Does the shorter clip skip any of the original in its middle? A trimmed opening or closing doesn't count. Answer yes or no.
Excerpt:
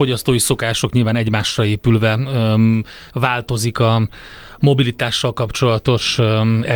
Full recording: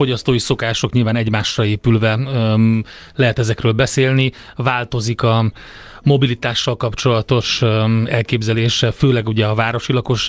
yes